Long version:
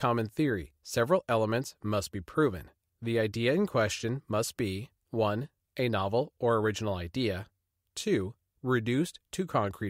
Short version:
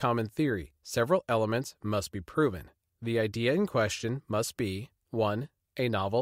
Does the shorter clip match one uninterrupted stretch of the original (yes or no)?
yes